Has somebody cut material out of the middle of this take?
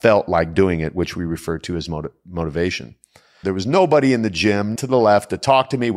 yes; 2 cuts; at 3.4 s, 4.8 s

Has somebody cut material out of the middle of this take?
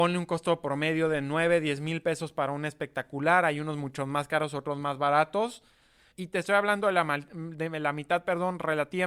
yes; 1 cut; at 6.1 s

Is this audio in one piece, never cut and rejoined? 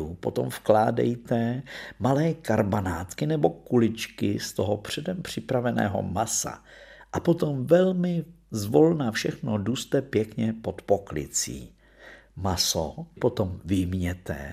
no; 1 cut; at 13.2 s

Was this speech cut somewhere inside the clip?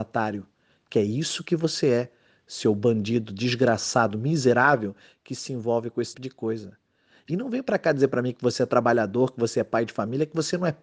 yes; 1 cut; at 6.1 s

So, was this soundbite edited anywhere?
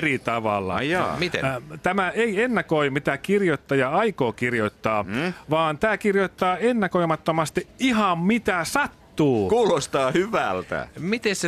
no; 0 cuts

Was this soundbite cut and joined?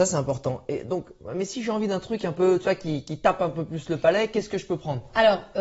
no; 0 cuts

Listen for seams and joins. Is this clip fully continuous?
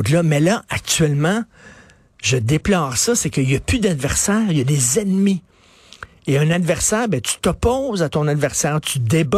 yes; 0 cuts

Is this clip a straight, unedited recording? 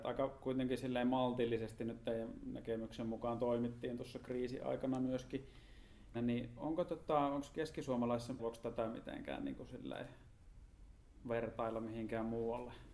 no; 2 cuts; at 6.1 s, 8.4 s

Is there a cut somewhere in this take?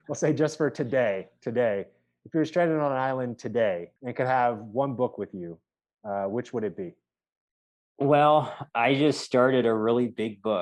yes; 1 cut; at 4.0 s

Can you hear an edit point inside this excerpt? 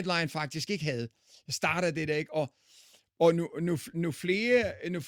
no; 0 cuts

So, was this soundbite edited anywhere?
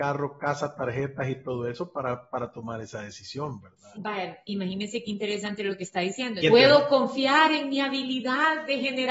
yes; 2 cuts; at 4.0 s, 6.4 s

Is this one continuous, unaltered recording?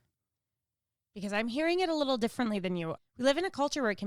no; 1 cut; at 3.0 s

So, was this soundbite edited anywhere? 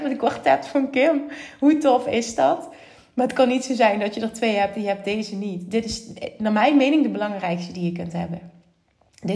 no; 0 cuts

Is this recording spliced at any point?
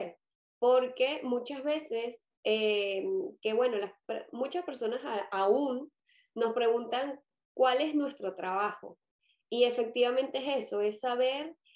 no; 0 cuts

